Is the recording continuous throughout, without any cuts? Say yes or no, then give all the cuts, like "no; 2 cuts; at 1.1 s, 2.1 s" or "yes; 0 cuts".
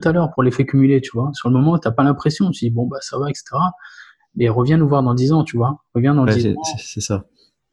yes; 0 cuts